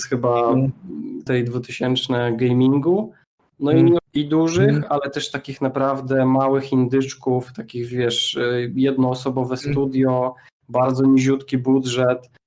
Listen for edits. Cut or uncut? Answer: cut